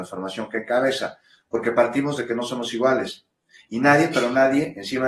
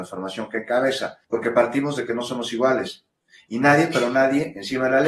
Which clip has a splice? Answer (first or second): second